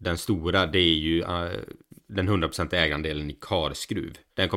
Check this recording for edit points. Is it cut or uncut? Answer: uncut